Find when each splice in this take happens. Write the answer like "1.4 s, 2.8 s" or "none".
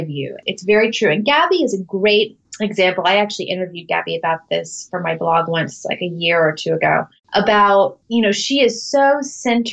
none